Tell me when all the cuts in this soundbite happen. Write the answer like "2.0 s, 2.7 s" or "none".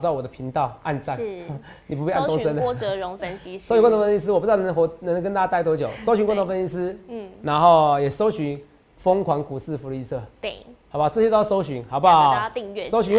none